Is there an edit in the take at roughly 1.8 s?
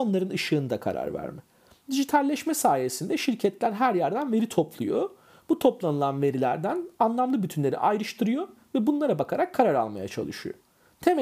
yes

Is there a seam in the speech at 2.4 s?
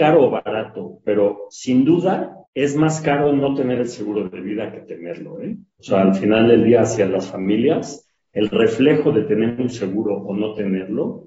yes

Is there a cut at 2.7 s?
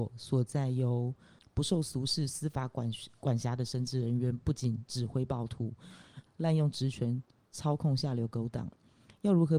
no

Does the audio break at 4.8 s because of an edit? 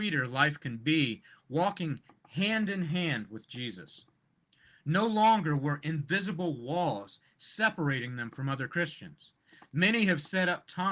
no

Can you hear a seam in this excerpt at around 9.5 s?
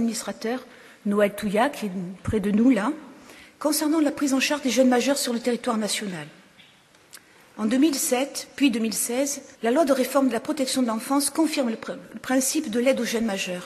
yes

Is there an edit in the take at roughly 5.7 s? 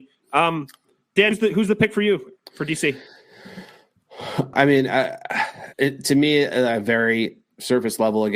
yes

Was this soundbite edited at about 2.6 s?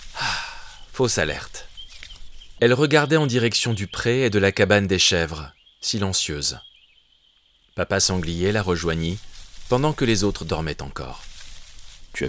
yes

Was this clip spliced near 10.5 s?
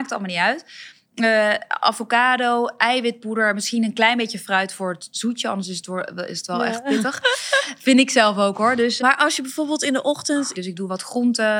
yes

